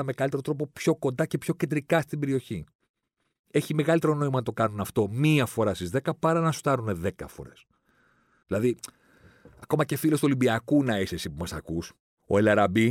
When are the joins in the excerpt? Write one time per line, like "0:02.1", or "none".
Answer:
0:08.4